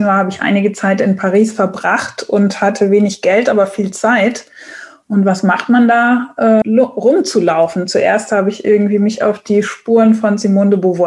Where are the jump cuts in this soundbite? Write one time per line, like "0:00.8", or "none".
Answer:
0:06.6